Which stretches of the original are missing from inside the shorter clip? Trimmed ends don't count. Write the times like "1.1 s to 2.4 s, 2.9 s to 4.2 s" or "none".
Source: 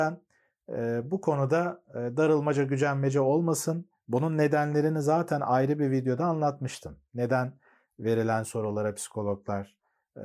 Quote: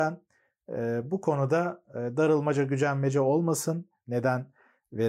4.0 s to 7.1 s